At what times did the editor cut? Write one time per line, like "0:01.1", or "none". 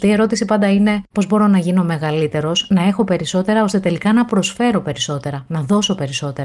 0:01.1